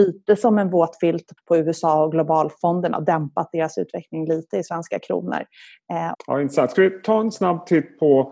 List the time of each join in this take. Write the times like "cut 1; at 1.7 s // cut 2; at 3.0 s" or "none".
cut 1; at 1.4 s // cut 2; at 6.1 s